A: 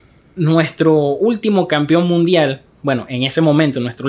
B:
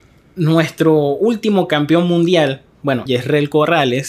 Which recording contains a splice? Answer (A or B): B